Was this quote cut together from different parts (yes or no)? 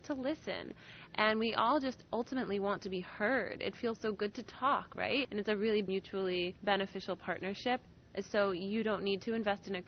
yes